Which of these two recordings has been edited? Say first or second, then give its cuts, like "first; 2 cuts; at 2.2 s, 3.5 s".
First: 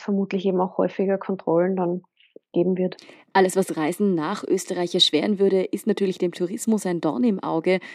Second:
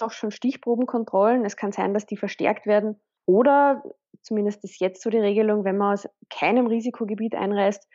second; 1 cut; at 3.2 s